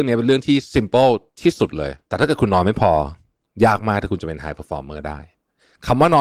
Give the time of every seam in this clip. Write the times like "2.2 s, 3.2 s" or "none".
2.0 s